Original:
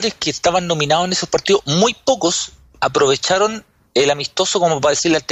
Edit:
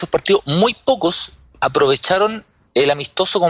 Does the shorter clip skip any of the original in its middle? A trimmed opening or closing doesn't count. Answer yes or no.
no